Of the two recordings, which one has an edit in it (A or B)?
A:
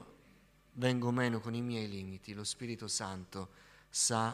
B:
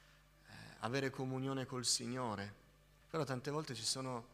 B